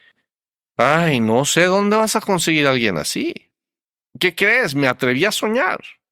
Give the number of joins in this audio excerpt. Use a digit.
1